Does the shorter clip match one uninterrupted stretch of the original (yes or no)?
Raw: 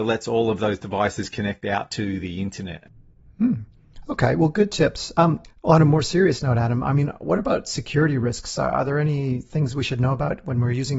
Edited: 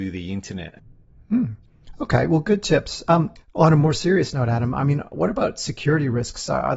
yes